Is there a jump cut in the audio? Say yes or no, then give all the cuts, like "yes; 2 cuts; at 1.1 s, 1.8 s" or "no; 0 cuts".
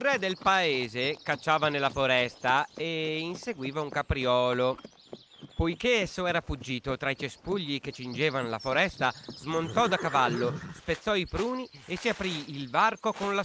no; 0 cuts